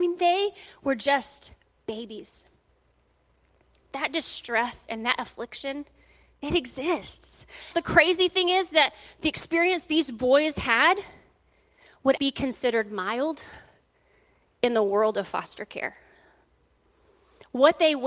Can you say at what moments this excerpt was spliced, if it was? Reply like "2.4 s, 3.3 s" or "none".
7.7 s, 12.2 s